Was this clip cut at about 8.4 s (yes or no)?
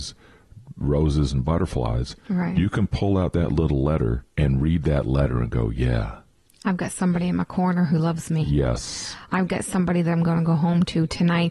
no